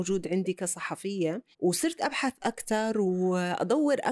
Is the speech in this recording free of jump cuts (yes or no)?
no